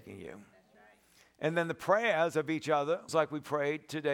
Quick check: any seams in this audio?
yes; 1 cut; at 3.1 s

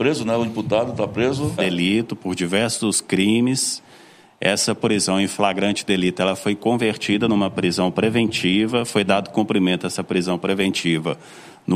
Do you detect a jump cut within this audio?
yes; 1 cut; at 1.6 s

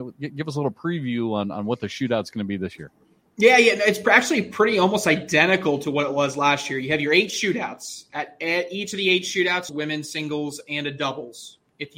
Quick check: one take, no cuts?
no; 1 cut; at 9.7 s

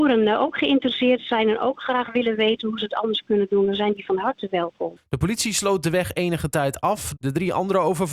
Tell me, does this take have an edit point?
yes; 2 cuts; at 5.0 s, 7.2 s

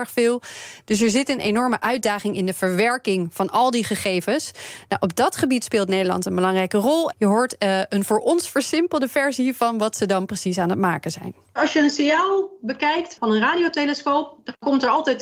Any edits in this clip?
yes; 1 cut; at 7.1 s

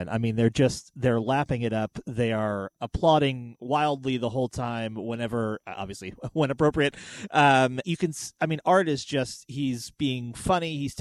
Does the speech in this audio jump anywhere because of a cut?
yes; 1 cut; at 7.8 s

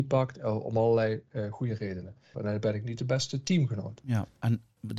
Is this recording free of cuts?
no; 1 cut; at 2.3 s

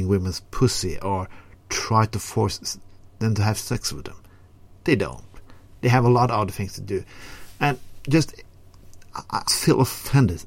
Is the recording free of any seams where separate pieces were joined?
no; 1 cut; at 9.5 s

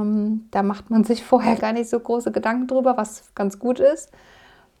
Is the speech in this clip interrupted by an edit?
yes; 1 cut; at 1.6 s

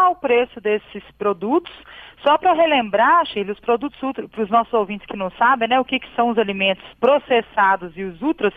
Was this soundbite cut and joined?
yes; 1 cut; at 6.9 s

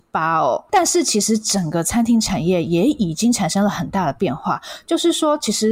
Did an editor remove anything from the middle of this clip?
no; 0 cuts

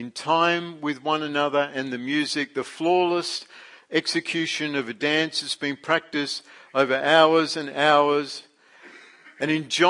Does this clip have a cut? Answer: no; 0 cuts

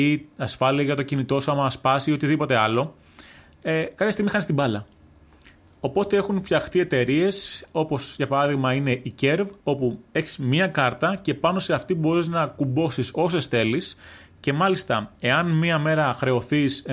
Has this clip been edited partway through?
yes; 1 cut; at 9.6 s

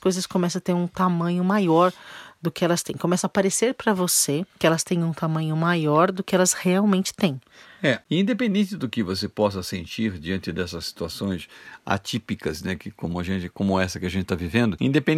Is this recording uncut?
yes; 0 cuts

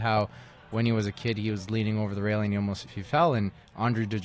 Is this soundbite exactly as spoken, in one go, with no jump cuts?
no; 1 cut; at 2.9 s

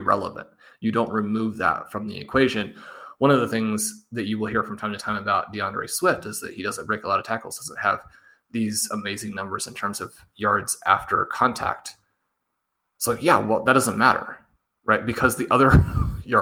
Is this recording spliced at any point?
no; 0 cuts

